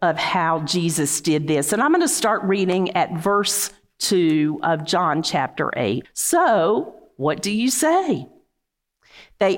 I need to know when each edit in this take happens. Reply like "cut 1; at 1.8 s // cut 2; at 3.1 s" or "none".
cut 1; at 6.0 s